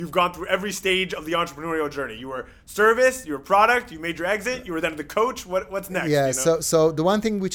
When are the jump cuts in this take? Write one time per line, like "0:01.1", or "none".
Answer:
none